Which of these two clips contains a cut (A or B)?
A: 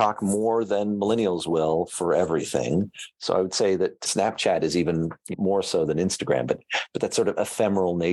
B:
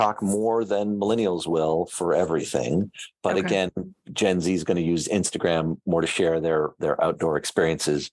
A